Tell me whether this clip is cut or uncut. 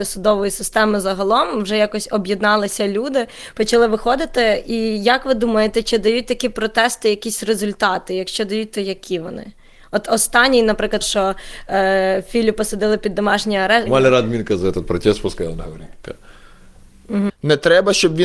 cut